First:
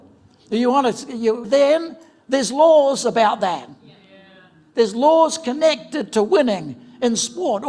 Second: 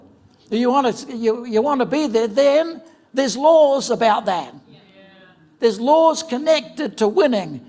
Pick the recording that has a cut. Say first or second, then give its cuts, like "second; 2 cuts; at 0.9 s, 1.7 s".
first; 1 cut; at 1.4 s